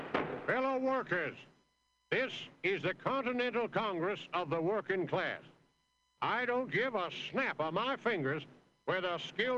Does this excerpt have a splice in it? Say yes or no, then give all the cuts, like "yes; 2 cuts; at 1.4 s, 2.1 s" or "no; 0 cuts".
no; 0 cuts